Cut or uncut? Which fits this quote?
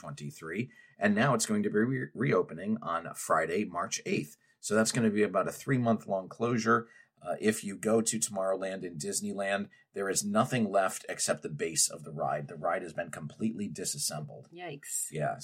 uncut